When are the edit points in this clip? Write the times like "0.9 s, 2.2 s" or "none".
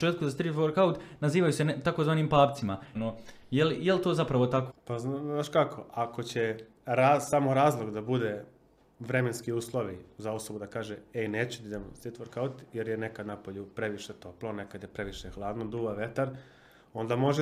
2.9 s, 4.7 s